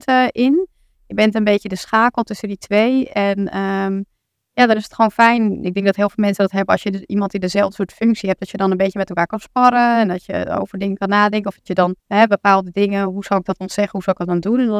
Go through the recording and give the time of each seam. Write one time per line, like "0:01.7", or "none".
0:12.0

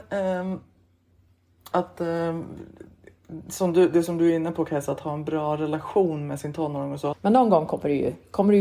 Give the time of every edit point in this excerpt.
0:01.7
0:07.1

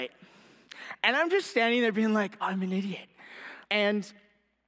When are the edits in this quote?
0:02.4
0:03.6

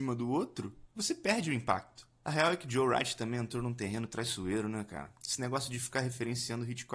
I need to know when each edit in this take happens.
none

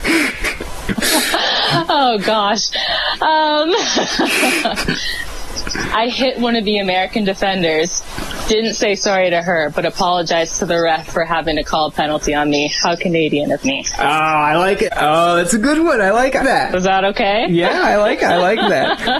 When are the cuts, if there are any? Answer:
0:14.9
0:16.4

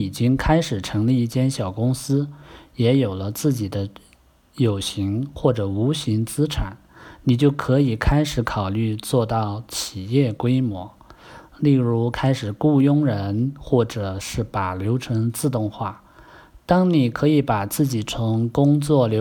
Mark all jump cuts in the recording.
none

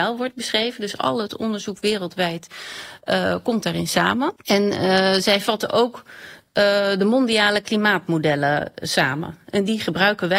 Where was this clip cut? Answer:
0:04.4

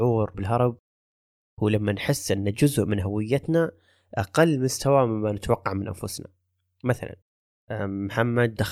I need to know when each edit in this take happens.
none

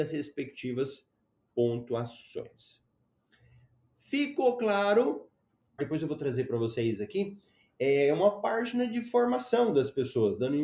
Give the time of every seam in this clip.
0:05.8

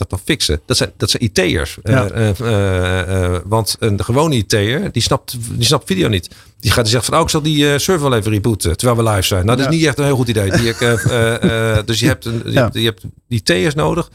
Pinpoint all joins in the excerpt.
0:02.1

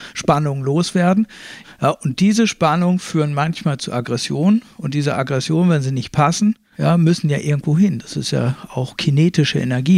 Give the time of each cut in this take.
0:01.6
0:06.7

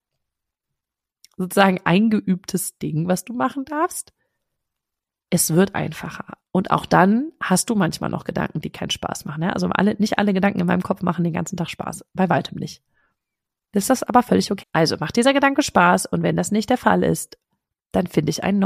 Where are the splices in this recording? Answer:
0:06.4
0:14.6

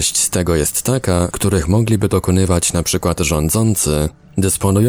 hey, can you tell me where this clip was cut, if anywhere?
0:01.3

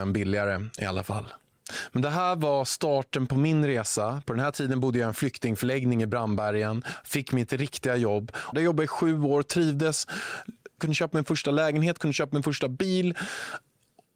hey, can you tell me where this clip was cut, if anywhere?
0:08.5
0:10.8

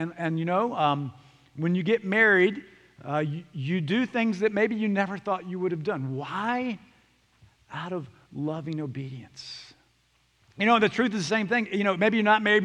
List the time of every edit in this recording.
none

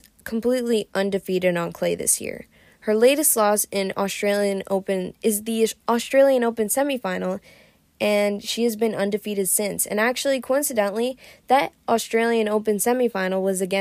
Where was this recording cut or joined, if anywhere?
none

